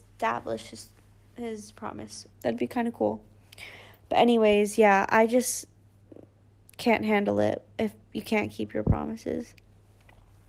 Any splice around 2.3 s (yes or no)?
yes